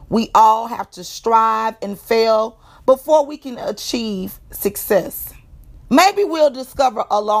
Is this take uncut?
no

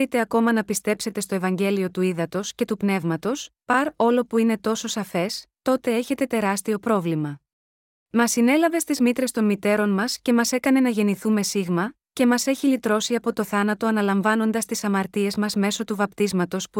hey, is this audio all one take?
no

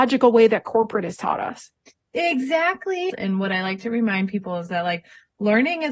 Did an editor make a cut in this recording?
yes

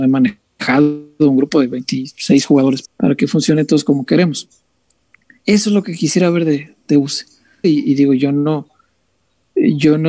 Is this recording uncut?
no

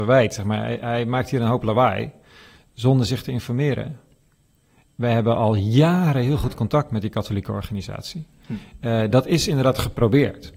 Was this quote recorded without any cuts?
yes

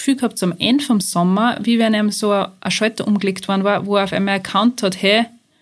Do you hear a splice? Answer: no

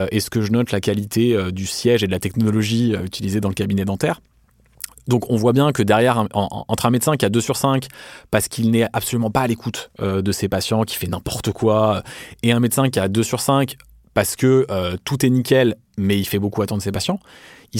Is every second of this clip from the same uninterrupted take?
yes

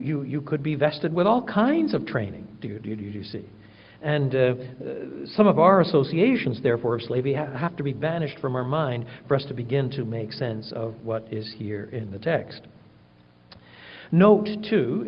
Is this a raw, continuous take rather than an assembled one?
yes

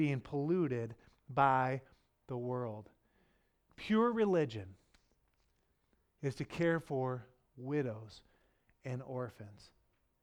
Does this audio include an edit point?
no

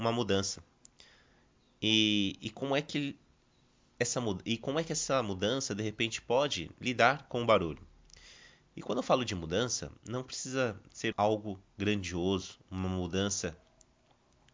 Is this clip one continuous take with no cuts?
no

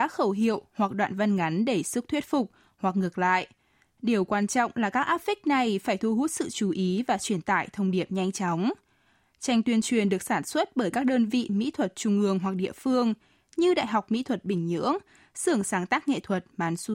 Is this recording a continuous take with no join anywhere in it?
yes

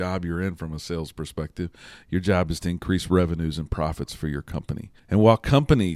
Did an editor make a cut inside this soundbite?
yes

